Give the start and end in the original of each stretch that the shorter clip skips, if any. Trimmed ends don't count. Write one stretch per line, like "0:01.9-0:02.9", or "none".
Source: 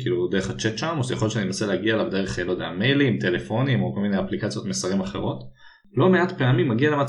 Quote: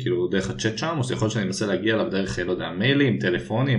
none